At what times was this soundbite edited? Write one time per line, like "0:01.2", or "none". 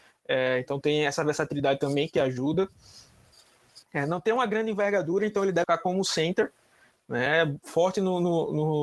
0:05.6